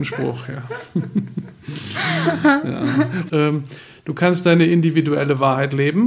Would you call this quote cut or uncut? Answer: cut